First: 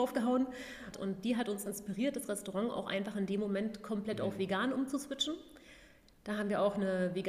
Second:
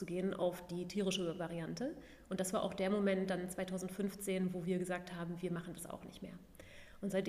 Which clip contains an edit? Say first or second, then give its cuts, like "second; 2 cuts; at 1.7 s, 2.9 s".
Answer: first; 1 cut; at 0.9 s